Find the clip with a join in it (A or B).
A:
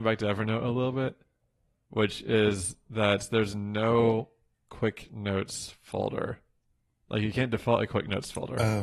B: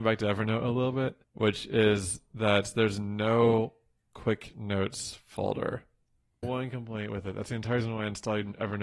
B